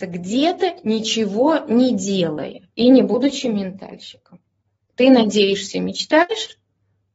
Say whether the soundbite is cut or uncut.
cut